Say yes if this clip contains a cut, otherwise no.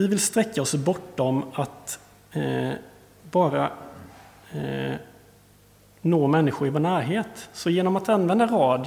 no